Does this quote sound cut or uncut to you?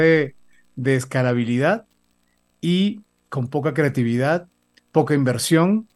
uncut